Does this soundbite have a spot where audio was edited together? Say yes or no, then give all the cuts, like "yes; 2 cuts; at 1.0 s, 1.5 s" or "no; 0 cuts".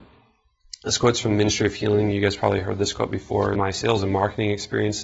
yes; 1 cut; at 3.5 s